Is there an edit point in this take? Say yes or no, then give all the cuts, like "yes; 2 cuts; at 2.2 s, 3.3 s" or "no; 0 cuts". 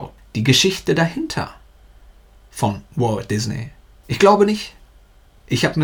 no; 0 cuts